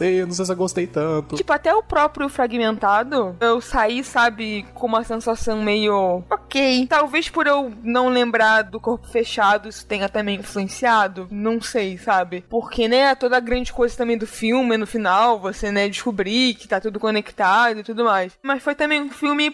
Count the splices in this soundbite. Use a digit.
0